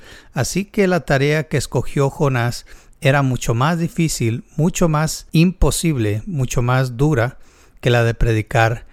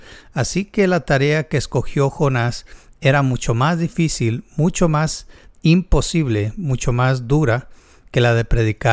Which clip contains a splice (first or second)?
first